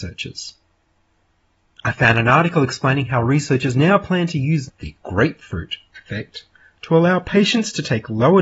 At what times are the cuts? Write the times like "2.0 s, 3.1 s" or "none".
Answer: none